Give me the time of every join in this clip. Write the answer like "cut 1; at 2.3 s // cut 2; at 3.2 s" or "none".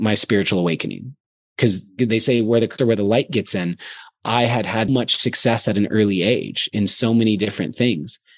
cut 1; at 2.8 s // cut 2; at 4.9 s

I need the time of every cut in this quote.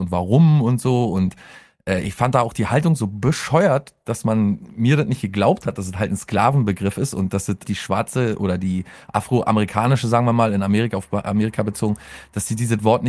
cut 1; at 7.6 s

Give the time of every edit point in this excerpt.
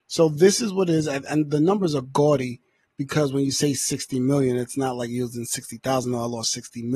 none

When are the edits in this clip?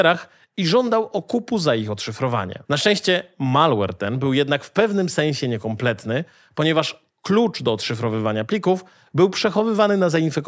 cut 1; at 2.7 s

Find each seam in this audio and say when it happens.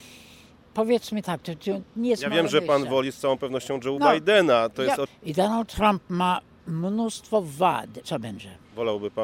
cut 1; at 5.1 s // cut 2; at 8.0 s

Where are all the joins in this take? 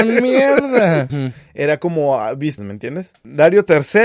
cut 1; at 1.1 s // cut 2; at 2.6 s

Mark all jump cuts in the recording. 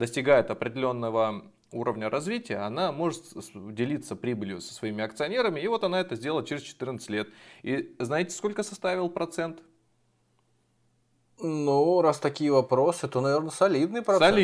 none

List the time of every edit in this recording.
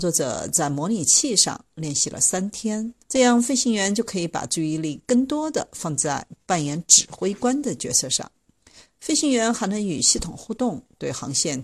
cut 1; at 3.0 s

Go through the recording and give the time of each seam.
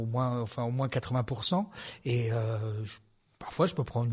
none

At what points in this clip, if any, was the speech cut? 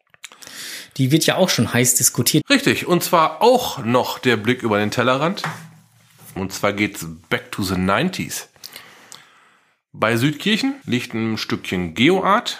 cut 1; at 2.4 s // cut 2; at 6.4 s // cut 3; at 10.8 s

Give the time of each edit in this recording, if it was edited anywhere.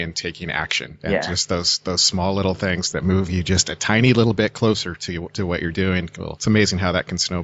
none

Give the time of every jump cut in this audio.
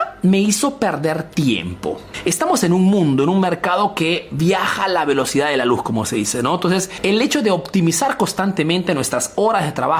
none

